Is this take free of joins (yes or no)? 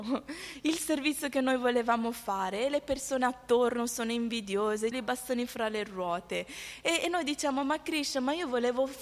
no